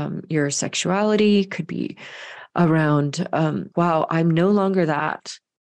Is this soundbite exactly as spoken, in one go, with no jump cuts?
no; 1 cut; at 3.7 s

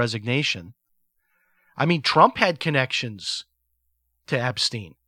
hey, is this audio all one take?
yes; 0 cuts

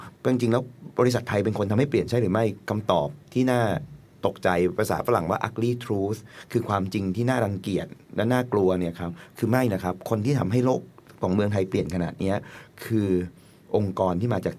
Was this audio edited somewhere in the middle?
no; 0 cuts

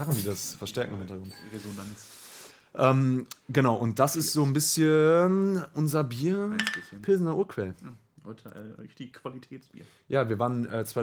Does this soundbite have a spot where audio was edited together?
no; 0 cuts

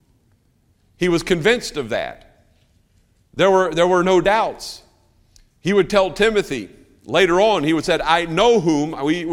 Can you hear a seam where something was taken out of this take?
no; 0 cuts

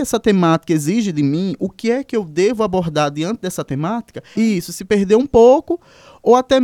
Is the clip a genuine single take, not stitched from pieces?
no; 1 cut; at 4.4 s

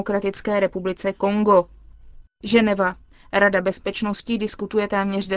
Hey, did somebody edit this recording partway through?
yes; 1 cut; at 2.3 s

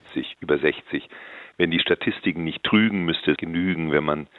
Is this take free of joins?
no; 1 cut; at 3.4 s

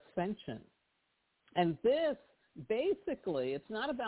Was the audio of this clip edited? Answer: no; 0 cuts

